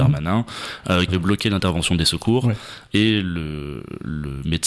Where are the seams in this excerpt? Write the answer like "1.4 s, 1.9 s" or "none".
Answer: 1.1 s, 2.9 s